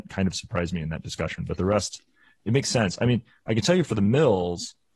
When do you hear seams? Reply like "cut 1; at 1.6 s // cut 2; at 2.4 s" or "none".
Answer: none